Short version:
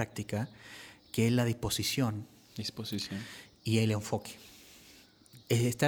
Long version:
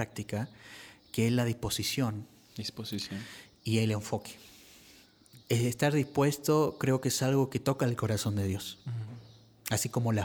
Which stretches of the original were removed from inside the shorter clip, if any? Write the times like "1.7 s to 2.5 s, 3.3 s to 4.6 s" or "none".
none

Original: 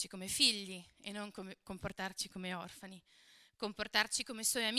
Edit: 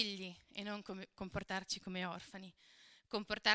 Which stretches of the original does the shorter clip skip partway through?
none

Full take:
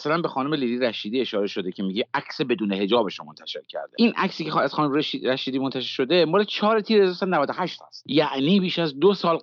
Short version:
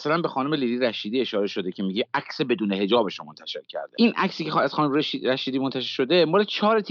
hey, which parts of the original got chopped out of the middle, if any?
none

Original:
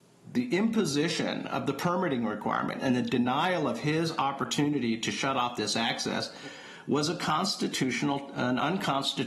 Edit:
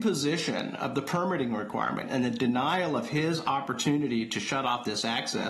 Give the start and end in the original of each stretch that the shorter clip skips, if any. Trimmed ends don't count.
none

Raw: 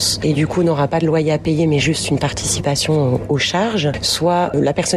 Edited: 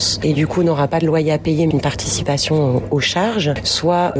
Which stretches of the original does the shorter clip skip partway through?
1.7 s to 2.1 s

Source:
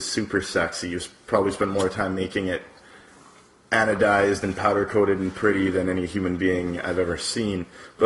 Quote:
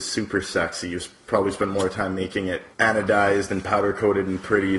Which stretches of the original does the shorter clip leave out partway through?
2.7 s to 3.6 s

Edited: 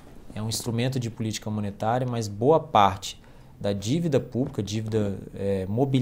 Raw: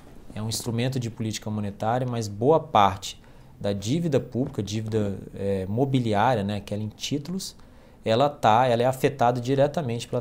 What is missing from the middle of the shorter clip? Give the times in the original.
none

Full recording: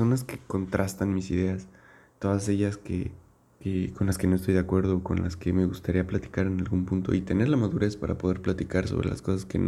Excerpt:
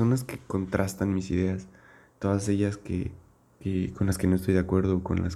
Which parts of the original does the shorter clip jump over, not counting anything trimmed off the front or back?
none

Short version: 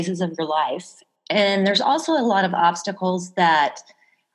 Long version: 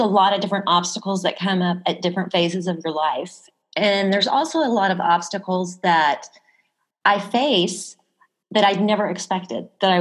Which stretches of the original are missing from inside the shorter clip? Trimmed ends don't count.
none

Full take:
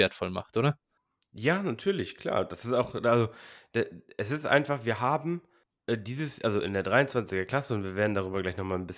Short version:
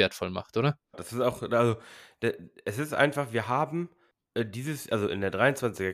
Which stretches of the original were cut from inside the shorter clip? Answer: 0.9 s to 2.5 s

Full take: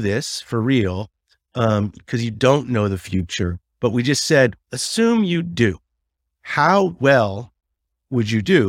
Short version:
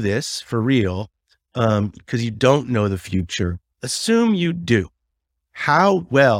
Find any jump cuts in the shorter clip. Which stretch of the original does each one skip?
3.7 s to 4.6 s

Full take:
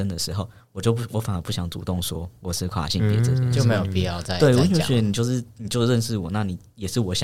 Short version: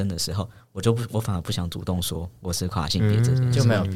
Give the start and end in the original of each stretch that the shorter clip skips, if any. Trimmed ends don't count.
none

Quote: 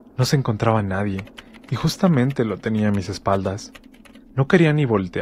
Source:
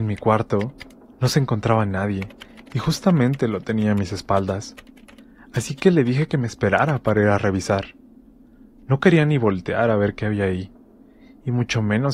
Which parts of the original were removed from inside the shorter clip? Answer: 5.3 s to 8.8 s

